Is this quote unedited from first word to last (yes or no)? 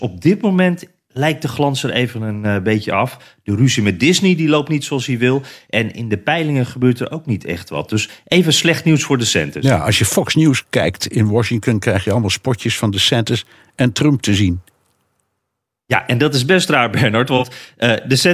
yes